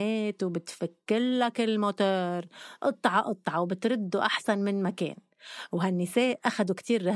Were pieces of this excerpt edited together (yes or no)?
no